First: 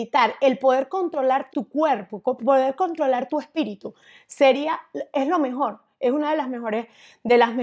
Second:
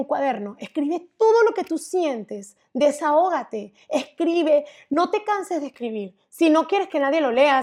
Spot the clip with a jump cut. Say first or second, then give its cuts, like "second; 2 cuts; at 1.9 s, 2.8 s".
first; 1 cut; at 1.5 s